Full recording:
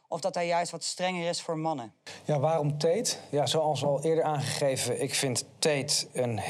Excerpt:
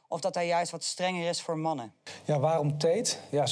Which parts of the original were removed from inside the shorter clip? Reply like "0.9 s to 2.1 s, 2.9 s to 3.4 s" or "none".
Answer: none

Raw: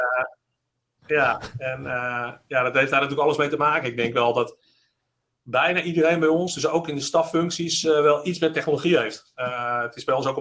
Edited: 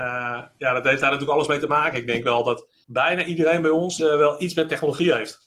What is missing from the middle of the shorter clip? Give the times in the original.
4.7 s to 5.4 s, 6.6 s to 7.8 s

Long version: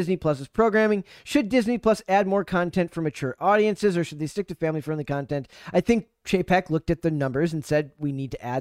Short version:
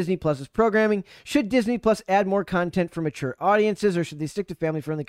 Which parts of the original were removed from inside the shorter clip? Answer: none

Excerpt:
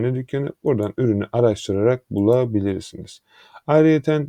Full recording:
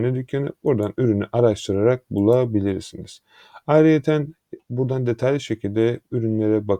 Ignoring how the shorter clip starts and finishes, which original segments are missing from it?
none

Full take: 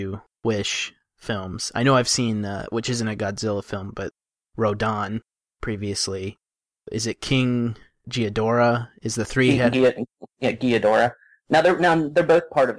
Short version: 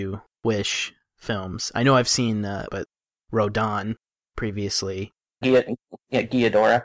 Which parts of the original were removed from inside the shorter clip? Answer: 2.7 s to 3.9 s, 6.7 s to 9.7 s

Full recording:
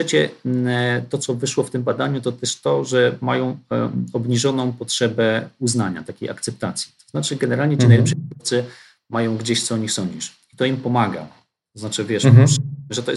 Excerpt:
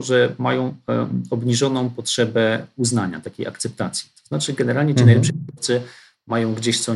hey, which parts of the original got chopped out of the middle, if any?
none

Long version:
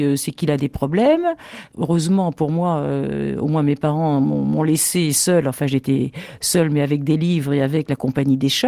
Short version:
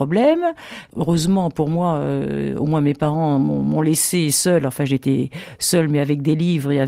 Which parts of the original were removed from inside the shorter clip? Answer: none

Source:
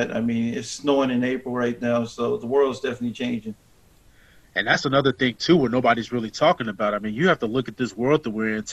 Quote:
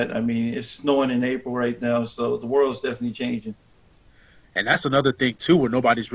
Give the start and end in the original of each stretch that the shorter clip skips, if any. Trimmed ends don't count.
none

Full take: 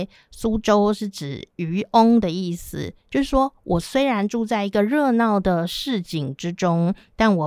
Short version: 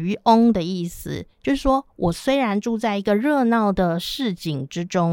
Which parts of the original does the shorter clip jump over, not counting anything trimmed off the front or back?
none

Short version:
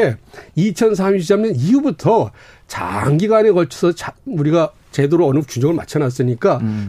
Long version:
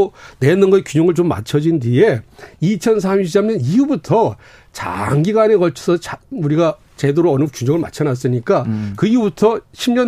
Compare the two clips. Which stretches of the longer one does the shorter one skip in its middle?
none

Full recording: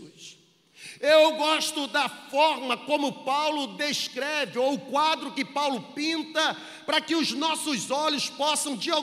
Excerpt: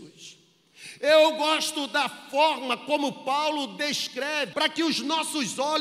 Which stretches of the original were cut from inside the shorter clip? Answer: 4.5 s to 6.8 s

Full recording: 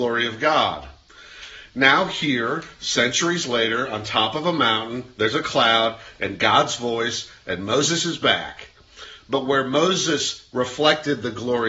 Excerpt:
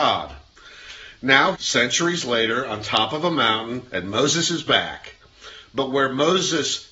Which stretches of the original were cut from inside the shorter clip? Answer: 2.1 s to 2.7 s, 5.1 s to 7.4 s

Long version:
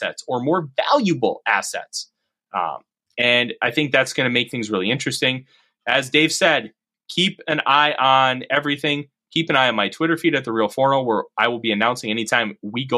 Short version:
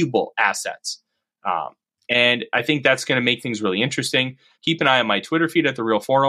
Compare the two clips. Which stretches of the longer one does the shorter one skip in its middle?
5.6 s to 9.2 s

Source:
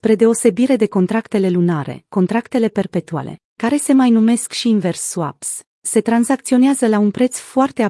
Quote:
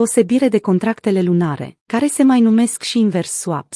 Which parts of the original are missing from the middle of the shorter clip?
2.1 s to 3.5 s

